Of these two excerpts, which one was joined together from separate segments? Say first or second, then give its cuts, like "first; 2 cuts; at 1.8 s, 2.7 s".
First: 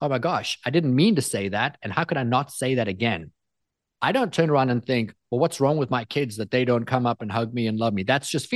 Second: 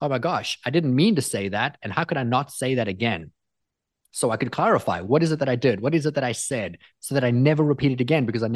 first; 1 cut; at 4.0 s